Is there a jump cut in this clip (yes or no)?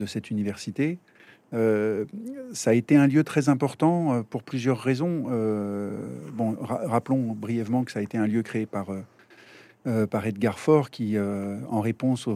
no